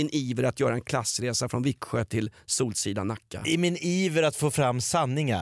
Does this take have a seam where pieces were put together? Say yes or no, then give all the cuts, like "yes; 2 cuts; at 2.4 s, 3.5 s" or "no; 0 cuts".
no; 0 cuts